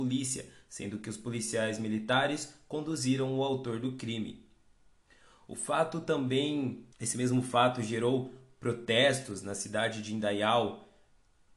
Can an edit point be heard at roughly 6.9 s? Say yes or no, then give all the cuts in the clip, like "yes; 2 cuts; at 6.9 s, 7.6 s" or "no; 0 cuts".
yes; 1 cut; at 6.9 s